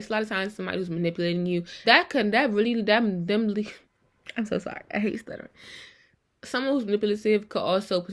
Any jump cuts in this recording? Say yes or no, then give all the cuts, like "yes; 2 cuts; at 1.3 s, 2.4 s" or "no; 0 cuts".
yes; 1 cut; at 1.8 s